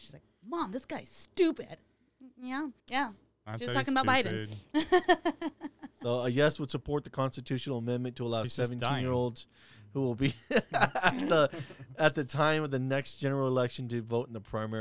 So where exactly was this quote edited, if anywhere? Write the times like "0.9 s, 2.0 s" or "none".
2.8 s